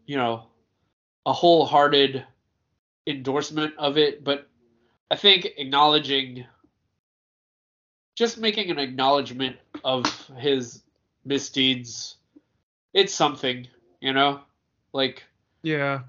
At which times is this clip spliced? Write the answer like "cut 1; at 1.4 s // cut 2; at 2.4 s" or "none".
none